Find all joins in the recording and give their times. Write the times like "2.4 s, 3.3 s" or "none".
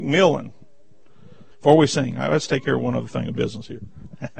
1.5 s